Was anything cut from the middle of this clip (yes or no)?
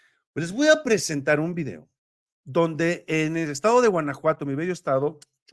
no